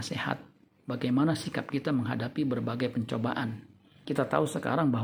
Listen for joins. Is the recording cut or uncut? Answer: cut